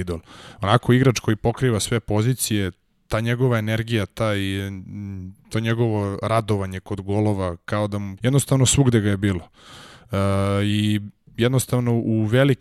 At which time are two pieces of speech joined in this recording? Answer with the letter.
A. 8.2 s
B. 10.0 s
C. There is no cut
A